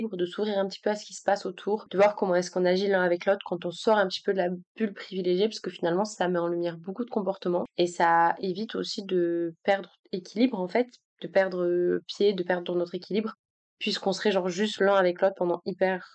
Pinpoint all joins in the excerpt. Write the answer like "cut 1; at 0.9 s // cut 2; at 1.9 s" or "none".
none